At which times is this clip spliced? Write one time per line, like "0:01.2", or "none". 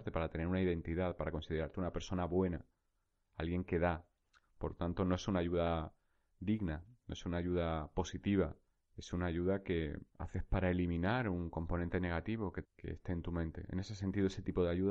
0:04.4
0:10.1
0:12.6